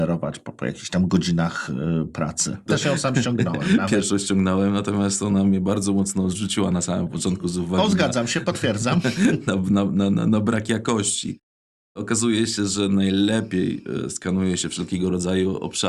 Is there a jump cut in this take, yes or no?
yes